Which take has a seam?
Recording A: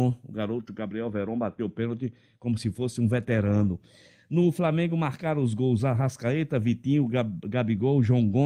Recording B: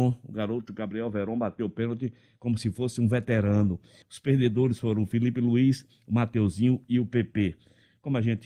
B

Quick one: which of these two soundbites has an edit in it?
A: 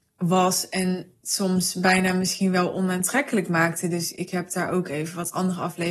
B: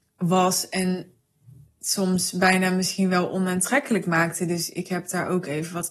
A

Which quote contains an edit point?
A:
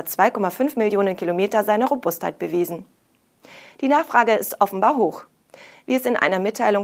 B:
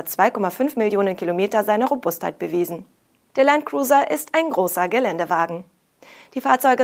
B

